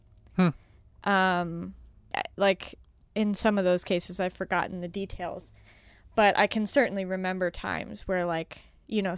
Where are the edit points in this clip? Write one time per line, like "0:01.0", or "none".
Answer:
0:02.1